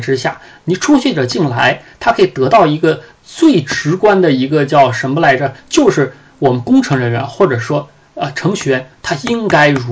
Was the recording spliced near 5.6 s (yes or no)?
yes